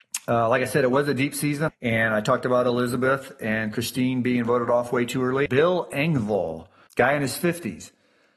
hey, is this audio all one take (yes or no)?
no